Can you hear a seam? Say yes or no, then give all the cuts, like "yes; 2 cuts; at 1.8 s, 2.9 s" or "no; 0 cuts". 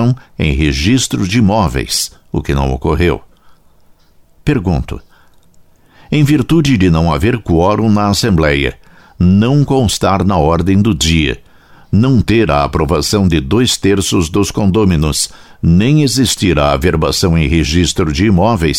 no; 0 cuts